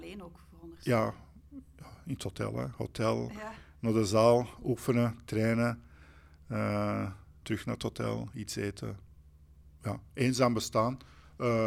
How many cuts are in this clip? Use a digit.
1